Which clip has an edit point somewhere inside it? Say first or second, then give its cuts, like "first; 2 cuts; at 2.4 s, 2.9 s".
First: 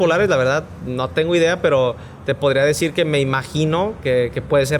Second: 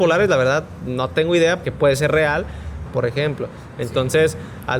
second; 2 cuts; at 1.6 s, 2.9 s